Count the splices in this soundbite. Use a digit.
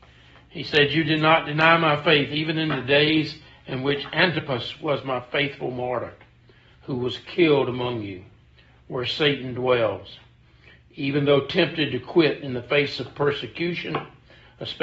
0